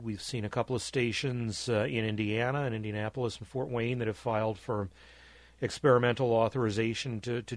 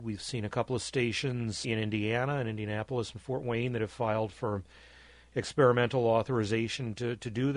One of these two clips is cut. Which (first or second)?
second